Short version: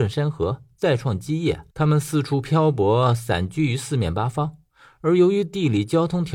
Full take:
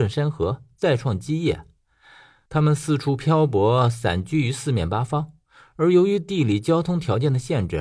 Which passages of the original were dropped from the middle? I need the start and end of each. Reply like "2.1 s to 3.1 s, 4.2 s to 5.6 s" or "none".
1.7 s to 2.4 s